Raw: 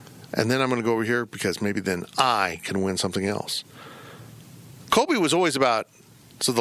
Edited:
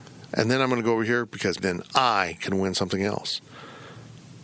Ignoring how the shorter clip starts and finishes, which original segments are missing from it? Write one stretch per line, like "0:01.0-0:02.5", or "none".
0:01.6-0:01.8